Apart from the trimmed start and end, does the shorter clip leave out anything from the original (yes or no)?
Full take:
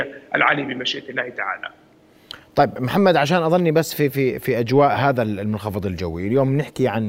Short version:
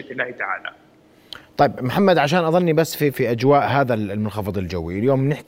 yes